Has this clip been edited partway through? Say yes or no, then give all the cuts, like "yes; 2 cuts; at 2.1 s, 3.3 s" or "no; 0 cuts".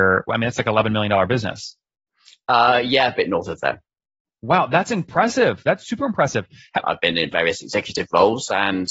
yes; 1 cut; at 6.8 s